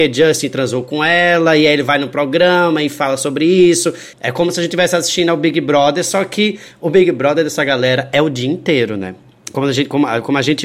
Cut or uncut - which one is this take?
cut